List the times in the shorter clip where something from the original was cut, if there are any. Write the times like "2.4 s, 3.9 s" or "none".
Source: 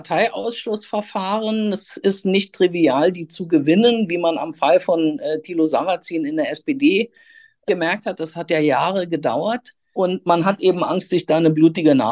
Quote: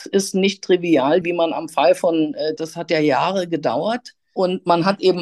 1.2 s, 2.6 s